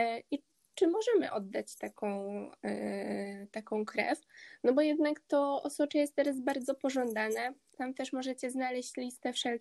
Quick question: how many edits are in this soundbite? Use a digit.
1